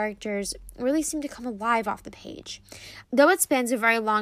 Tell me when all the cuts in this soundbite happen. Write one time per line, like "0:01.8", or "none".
0:03.0

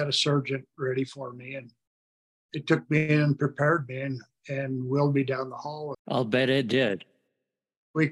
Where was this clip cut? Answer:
0:05.9

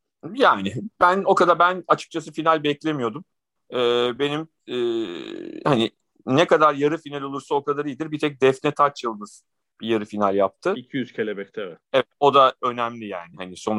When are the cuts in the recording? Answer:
none

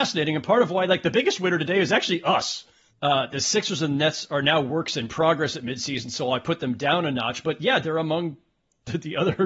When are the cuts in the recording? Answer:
0:02.9

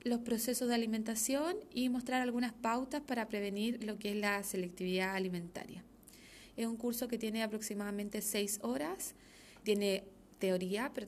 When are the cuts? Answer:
0:06.5
0:09.6

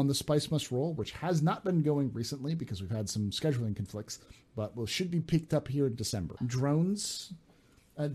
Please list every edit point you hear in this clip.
0:06.4

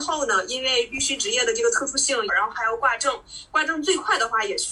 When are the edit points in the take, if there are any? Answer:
0:02.3

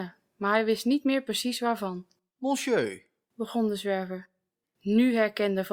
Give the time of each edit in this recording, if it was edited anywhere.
0:04.6

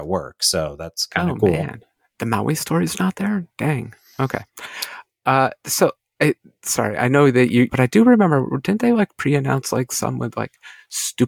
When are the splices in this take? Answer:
0:07.7

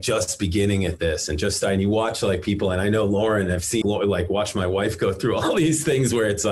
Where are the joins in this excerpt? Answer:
0:03.8

